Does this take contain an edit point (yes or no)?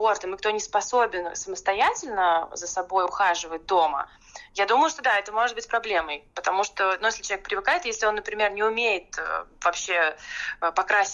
no